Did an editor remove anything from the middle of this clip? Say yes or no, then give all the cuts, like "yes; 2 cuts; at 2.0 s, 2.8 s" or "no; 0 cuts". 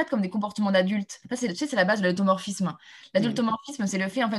no; 0 cuts